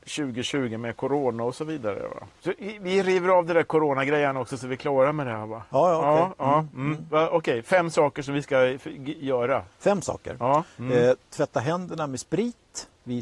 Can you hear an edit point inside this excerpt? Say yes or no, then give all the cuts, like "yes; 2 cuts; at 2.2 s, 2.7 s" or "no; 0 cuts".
no; 0 cuts